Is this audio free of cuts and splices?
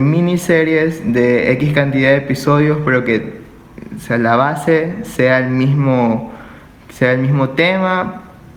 yes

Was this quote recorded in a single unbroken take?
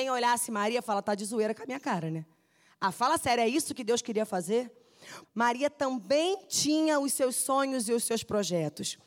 no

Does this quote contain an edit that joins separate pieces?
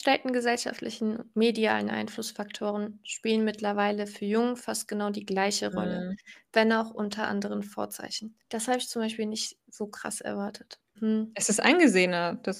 yes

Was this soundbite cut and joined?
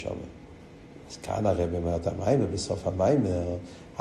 yes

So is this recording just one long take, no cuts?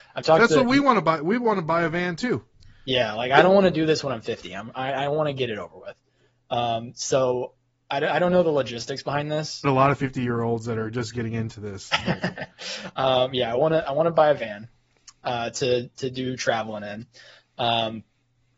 no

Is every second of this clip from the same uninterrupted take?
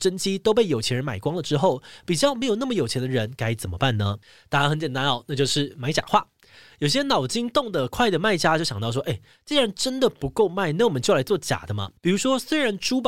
no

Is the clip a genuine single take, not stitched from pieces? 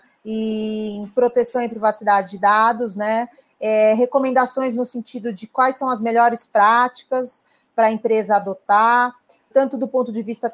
no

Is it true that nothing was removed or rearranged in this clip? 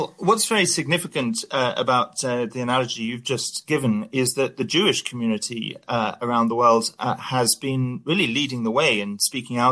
yes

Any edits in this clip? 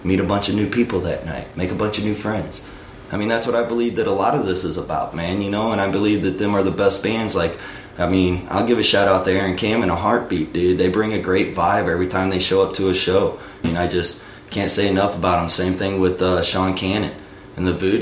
yes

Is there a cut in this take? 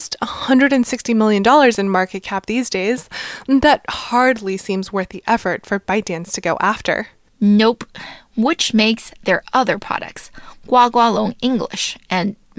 no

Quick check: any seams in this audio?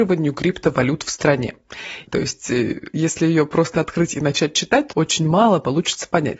yes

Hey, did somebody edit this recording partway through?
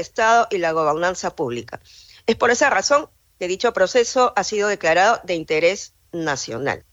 no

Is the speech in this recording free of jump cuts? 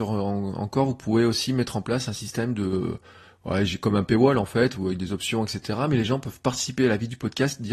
yes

